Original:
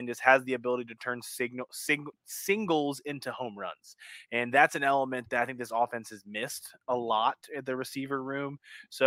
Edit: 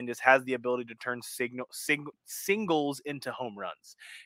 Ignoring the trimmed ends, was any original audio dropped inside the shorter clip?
no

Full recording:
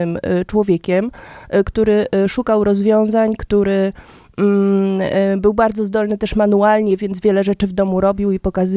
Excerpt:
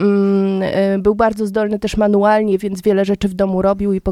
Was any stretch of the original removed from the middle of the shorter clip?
no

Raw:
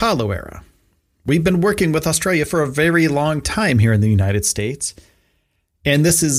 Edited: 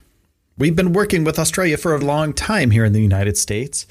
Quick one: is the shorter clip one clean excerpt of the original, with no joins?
no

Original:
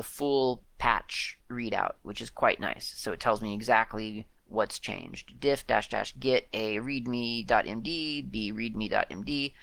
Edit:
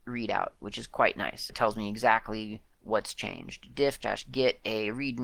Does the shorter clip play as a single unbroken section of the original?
no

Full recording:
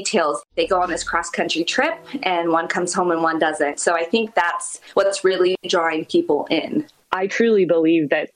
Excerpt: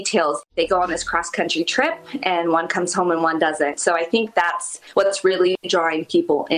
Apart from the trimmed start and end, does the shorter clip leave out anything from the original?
no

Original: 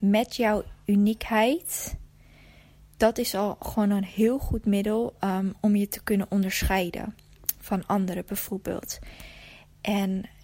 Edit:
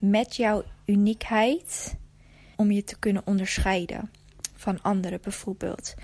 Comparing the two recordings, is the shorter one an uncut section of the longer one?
no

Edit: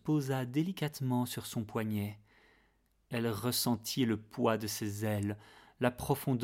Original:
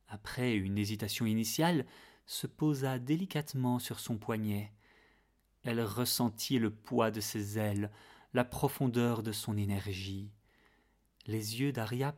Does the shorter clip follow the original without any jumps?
yes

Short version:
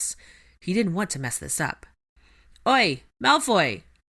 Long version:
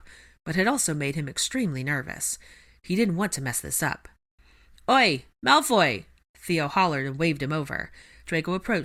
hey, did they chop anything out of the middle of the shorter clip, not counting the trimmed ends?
no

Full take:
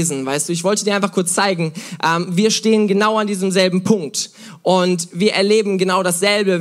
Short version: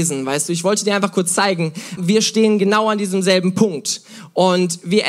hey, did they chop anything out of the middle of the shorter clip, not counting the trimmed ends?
yes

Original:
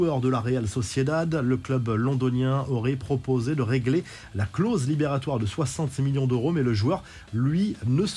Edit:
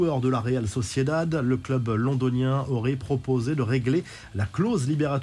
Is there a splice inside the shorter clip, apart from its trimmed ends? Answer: no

